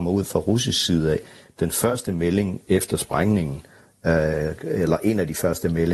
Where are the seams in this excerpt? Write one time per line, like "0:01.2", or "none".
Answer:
none